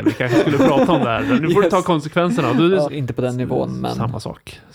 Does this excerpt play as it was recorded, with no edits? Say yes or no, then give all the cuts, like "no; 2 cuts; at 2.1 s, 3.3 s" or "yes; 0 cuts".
no; 1 cut; at 2.8 s